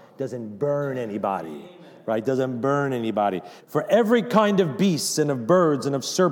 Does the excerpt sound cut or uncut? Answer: cut